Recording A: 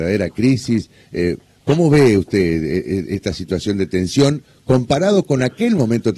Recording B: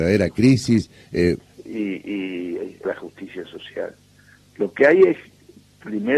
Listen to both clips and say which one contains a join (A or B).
B